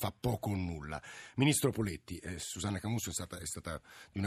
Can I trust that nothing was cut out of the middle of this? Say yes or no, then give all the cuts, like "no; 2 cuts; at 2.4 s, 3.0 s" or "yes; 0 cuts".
yes; 0 cuts